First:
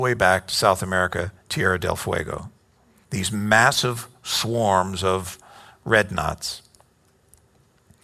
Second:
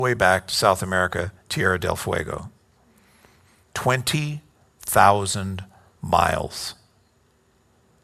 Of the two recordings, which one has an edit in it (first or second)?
first